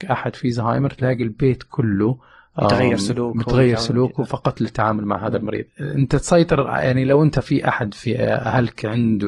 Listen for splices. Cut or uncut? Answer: uncut